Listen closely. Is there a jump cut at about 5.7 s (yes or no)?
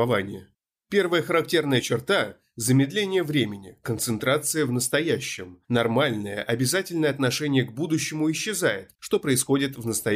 no